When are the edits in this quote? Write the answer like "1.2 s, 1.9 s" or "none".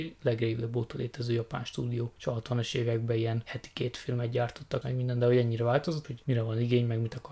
4.8 s, 6.0 s